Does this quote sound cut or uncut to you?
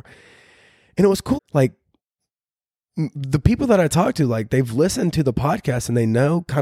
cut